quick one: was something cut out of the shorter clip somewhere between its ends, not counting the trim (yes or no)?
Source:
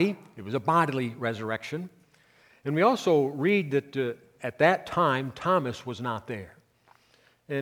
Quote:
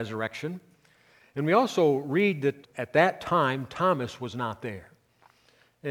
yes